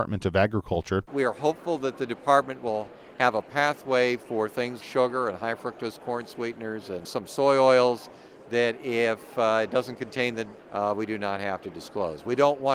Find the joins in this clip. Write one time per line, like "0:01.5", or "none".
0:01.1
0:04.8
0:10.6